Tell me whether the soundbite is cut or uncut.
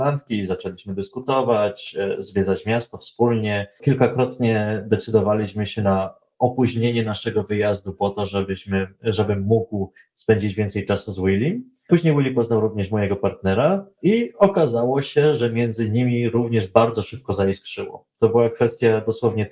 uncut